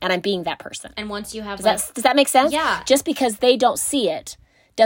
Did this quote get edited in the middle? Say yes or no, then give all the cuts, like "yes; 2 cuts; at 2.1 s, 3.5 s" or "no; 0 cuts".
no; 0 cuts